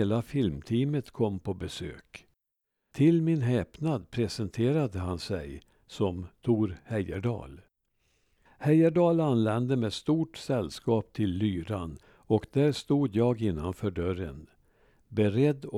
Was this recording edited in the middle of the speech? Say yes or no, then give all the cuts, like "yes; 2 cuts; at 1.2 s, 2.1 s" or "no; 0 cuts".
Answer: yes; 2 cuts; at 2.9 s, 8.5 s